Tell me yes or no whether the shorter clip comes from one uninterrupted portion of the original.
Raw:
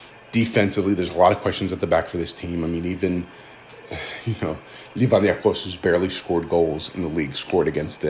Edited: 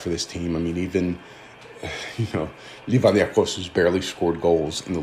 yes